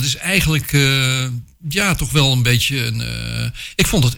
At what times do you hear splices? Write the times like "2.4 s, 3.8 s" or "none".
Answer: none